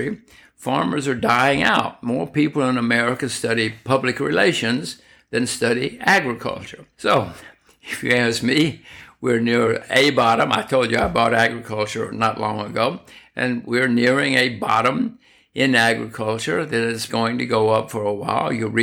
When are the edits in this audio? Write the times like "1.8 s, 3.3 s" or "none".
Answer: 6.9 s, 17.1 s